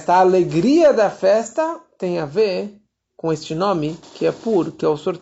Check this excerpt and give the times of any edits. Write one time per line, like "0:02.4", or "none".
none